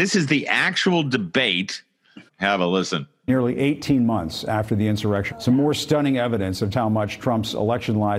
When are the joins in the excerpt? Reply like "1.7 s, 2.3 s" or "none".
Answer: 2.3 s, 5.3 s, 6.7 s